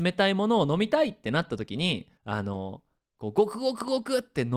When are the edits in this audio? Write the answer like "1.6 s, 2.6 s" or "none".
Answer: 2.1 s